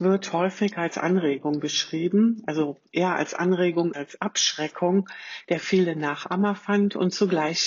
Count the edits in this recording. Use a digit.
1